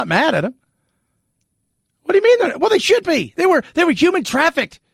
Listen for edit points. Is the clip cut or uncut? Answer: uncut